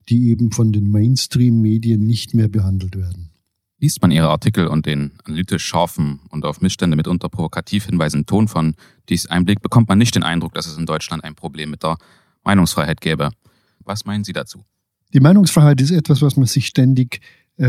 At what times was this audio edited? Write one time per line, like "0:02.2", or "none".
0:13.8